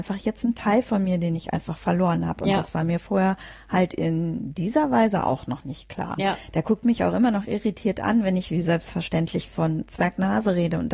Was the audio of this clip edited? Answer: yes; 1 cut; at 6.2 s

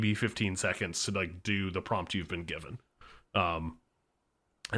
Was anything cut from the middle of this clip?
no; 0 cuts

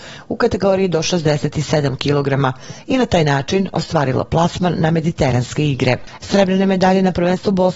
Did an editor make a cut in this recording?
no; 0 cuts

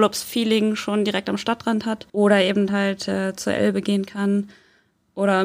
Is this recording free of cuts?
no; 1 cut; at 2.1 s

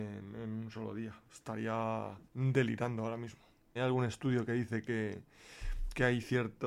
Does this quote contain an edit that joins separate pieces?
yes; 2 cuts; at 2.3 s, 3.8 s

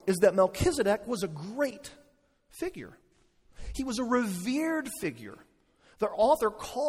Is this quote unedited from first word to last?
yes; 0 cuts

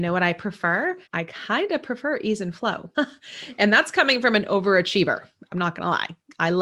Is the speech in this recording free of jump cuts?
no; 2 cuts; at 1.0 s, 2.9 s

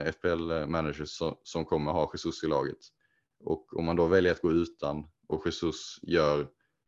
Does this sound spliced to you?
no; 0 cuts

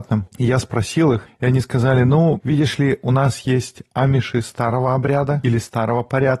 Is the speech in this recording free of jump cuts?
yes; 0 cuts

